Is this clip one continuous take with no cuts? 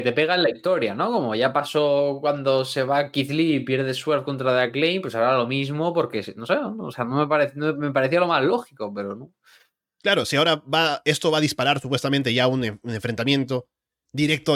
yes; 0 cuts

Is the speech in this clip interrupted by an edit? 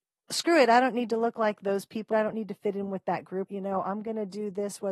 yes; 2 cuts; at 2.1 s, 3.5 s

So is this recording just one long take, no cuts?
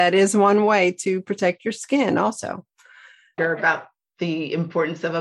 yes; 0 cuts

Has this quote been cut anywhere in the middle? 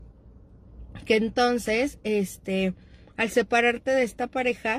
no; 0 cuts

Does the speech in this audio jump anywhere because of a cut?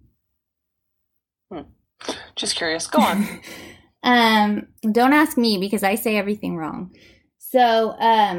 yes; 2 cuts; at 3.4 s, 4.8 s

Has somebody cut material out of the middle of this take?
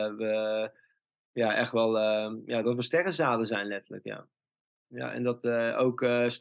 no; 0 cuts

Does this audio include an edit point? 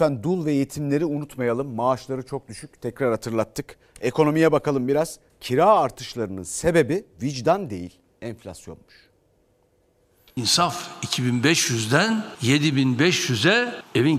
no; 0 cuts

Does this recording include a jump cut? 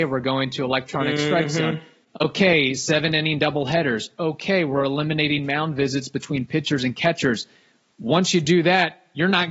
no; 0 cuts

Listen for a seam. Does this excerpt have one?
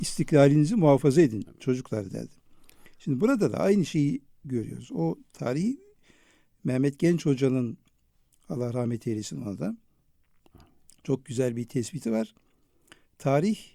no; 0 cuts

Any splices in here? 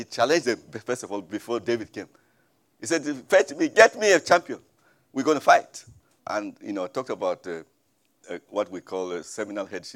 yes; 2 cuts; at 6.2 s, 8.2 s

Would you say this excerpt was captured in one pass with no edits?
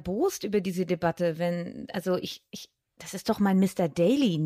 yes; 0 cuts

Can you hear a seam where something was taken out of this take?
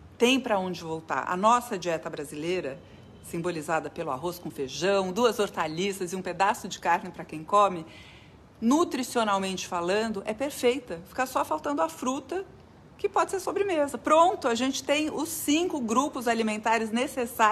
no; 0 cuts

